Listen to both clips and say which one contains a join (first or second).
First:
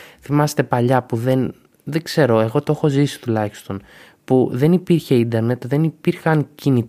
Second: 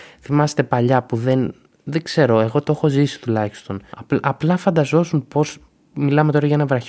second